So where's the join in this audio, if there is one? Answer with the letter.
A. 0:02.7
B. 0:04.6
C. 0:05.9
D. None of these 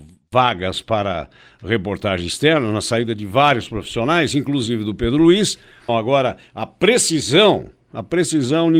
C